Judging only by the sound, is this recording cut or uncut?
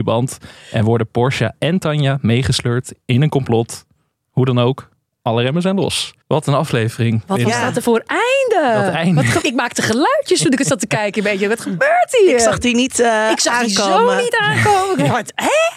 cut